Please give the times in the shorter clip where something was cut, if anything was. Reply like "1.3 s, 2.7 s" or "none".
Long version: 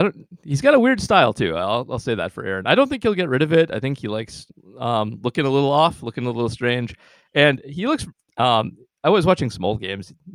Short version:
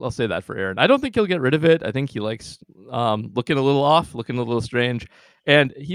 none

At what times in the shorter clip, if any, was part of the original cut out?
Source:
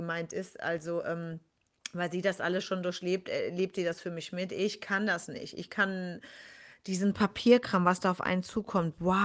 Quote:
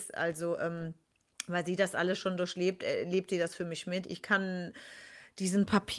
4.0 s

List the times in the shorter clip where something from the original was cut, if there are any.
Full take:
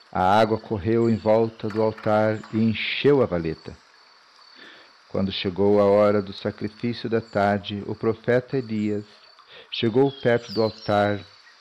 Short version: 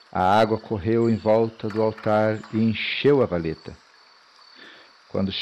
none

